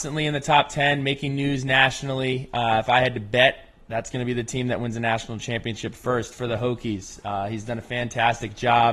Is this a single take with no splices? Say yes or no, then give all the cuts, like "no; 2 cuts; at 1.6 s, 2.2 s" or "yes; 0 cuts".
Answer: yes; 0 cuts